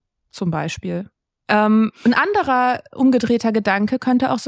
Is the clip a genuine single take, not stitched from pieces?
no; 1 cut; at 1.4 s

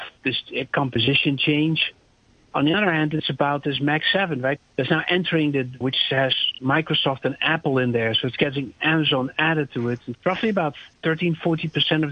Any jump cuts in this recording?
yes; 3 cuts; at 4.6 s, 5.8 s, 10.1 s

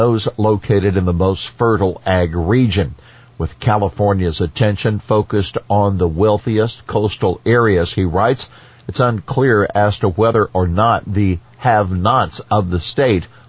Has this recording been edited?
no; 0 cuts

